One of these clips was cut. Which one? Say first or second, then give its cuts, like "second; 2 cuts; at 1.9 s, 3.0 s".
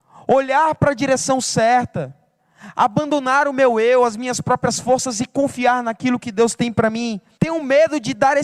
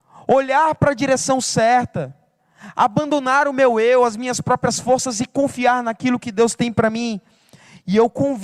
first; 1 cut; at 7.4 s